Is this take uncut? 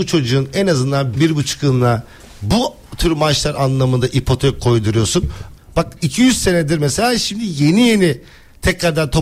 no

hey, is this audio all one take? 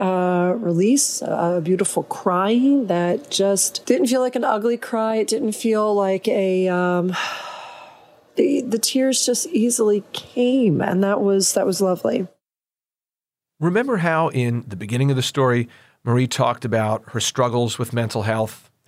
yes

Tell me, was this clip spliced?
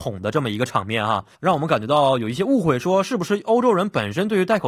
yes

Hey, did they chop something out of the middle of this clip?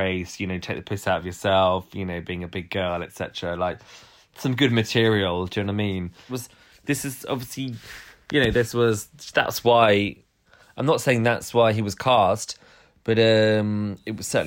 yes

